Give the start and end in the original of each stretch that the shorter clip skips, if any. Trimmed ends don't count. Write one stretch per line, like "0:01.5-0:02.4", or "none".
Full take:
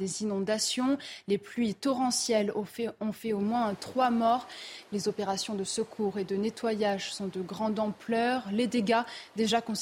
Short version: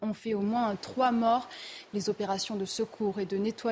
none

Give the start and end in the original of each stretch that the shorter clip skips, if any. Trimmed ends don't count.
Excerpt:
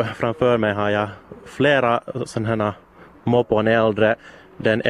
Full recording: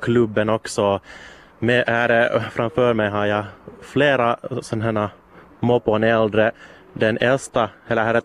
none

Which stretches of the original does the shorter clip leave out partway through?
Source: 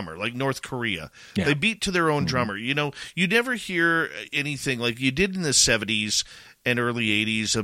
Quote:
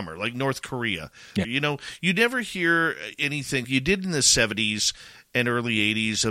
0:01.4-0:02.6
0:04.8-0:04.9

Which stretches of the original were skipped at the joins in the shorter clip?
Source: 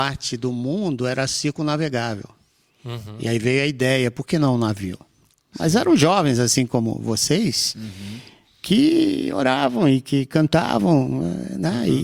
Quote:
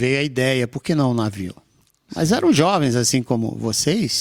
none

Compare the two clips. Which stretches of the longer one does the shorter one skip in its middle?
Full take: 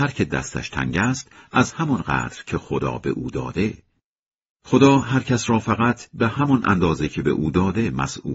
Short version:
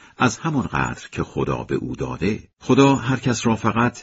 0:03.9-0:04.6

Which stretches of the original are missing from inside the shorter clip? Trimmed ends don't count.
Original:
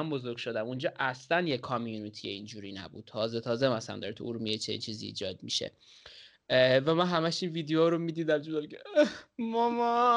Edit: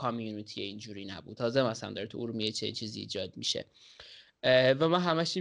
0:03.0-0:03.4

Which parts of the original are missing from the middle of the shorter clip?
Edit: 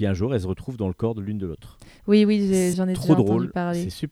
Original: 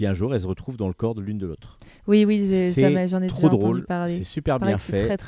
0:02.7-0:03.1

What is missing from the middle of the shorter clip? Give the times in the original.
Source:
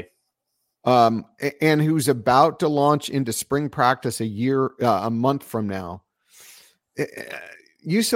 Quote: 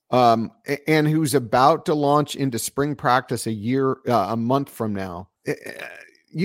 0:06.1-0:06.9

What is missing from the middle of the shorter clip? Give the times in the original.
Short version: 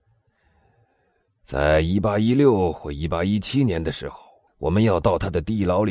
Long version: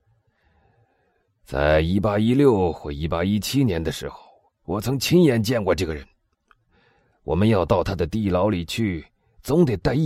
0:04.5-0:07.1

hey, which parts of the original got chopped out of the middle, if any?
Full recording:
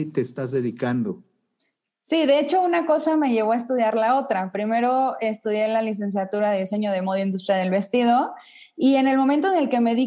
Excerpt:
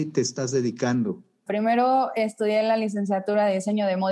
0:01.5-0:04.5

